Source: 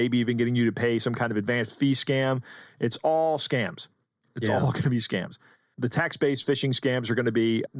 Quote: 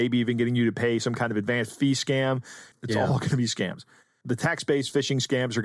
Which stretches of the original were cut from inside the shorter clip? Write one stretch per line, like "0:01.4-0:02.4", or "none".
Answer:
0:02.7-0:04.2